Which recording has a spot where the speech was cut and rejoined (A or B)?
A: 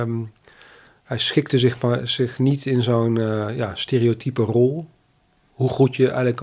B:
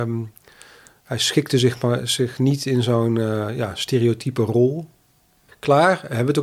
B